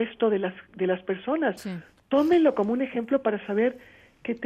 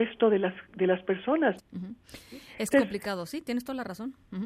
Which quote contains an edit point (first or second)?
second